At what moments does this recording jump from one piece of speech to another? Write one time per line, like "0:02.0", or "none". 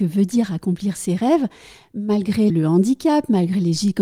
0:02.5